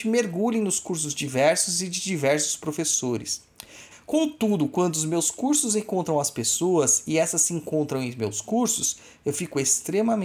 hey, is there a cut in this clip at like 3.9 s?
yes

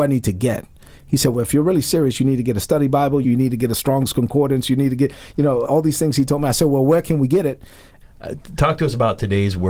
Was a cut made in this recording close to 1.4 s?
no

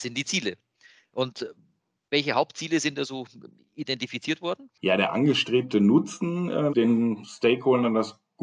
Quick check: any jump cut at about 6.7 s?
yes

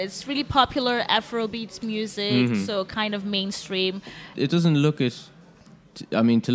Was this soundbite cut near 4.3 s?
yes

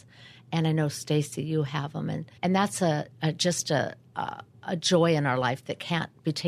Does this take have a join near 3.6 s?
no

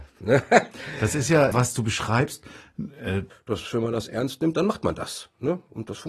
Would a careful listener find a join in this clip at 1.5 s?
yes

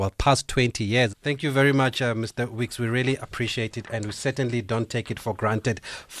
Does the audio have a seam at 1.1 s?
yes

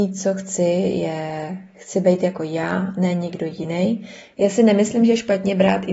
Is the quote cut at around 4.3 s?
yes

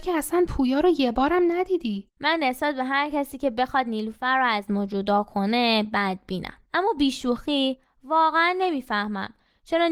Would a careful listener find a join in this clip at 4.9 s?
no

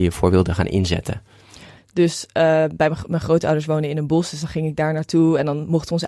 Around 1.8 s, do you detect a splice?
yes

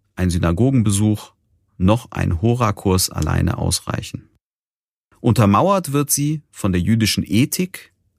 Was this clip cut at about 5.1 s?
yes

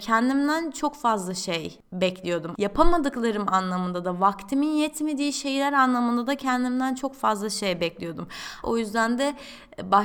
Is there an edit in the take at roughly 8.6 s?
yes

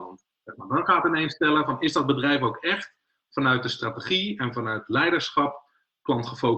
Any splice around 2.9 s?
no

